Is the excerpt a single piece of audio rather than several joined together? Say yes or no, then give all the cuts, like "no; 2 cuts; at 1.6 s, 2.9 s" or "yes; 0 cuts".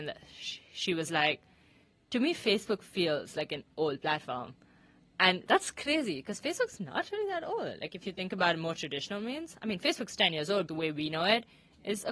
no; 1 cut; at 10.7 s